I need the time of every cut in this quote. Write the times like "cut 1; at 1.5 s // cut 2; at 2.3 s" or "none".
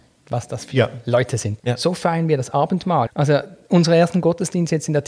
cut 1; at 1.6 s // cut 2; at 3.1 s